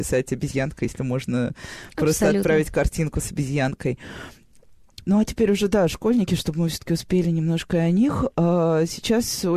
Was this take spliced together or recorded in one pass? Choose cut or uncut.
cut